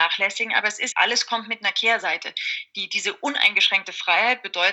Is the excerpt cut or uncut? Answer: cut